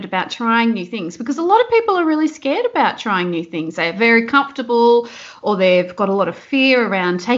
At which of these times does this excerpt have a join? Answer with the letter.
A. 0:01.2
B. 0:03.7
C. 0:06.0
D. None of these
D